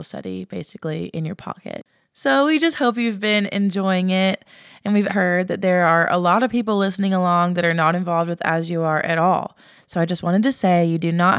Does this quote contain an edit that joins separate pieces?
yes; 1 cut; at 5.1 s

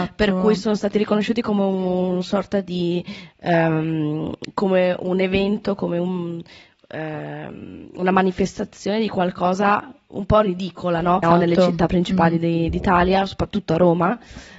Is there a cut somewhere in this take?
yes; 1 cut; at 11.2 s

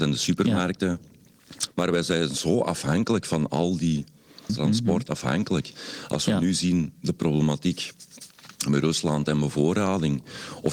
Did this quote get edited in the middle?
yes; 2 cuts; at 1.7 s, 4.5 s

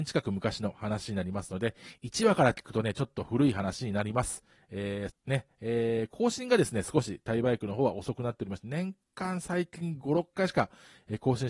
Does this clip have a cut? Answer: yes; 1 cut; at 5.1 s

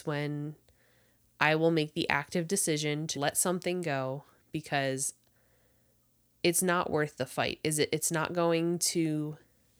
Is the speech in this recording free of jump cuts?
no; 1 cut; at 3.1 s

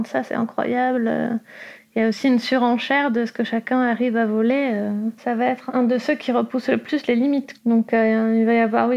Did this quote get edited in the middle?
yes; 1 cut; at 5.2 s

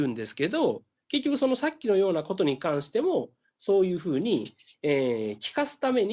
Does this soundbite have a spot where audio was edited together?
no; 0 cuts

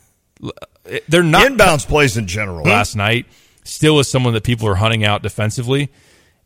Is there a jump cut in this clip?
yes; 1 cut; at 2.6 s

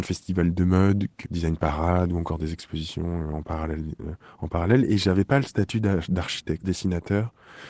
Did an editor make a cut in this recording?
yes; 2 cuts; at 1.2 s, 6.6 s

